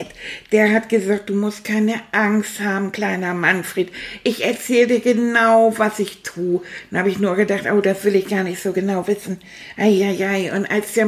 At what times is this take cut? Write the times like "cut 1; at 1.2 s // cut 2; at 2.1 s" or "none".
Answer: none